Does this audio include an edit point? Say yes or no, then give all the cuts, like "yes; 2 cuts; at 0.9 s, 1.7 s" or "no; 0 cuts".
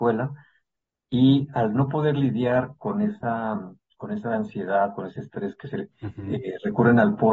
yes; 1 cut; at 5.9 s